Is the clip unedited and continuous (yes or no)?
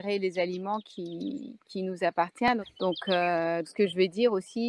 no